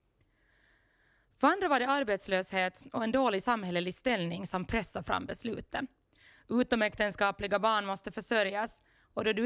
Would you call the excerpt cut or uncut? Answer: uncut